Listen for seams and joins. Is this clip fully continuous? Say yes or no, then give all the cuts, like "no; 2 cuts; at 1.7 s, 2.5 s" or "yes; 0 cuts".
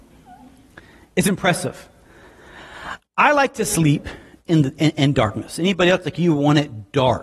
yes; 0 cuts